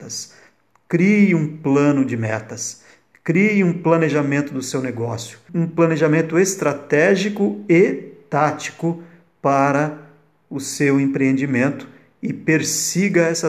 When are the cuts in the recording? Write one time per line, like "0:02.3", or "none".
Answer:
0:05.5